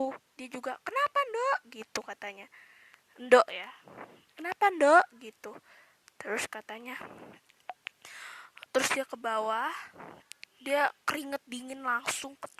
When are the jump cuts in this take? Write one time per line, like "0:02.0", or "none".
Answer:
none